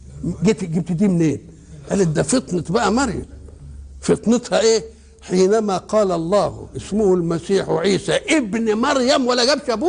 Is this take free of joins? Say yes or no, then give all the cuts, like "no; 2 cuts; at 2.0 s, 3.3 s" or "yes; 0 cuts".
yes; 0 cuts